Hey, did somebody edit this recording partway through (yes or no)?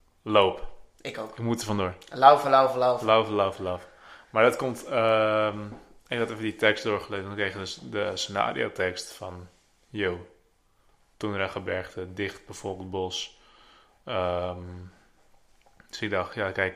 no